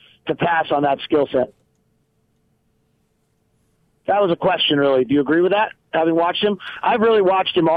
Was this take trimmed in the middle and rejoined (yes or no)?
no